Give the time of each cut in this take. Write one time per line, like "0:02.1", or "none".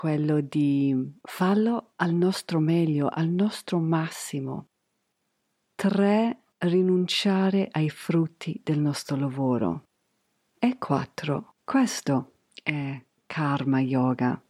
0:11.6